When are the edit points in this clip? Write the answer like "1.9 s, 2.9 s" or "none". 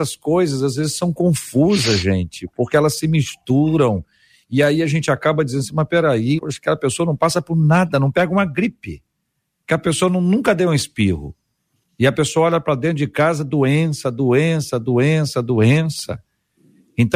6.4 s